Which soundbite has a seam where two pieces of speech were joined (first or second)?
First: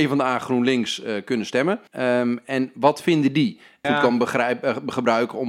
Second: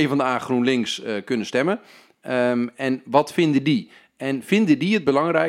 first